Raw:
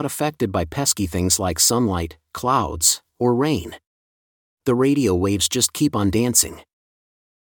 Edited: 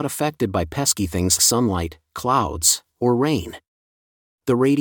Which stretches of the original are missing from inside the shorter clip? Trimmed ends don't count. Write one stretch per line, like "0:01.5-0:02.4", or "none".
0:01.4-0:01.6